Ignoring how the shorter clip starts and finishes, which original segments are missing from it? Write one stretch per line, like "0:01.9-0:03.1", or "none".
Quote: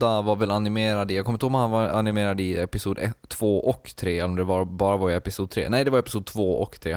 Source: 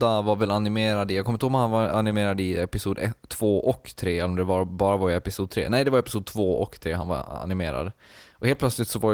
none